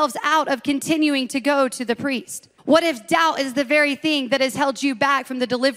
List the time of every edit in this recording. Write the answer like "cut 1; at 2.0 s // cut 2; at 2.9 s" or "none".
cut 1; at 2.6 s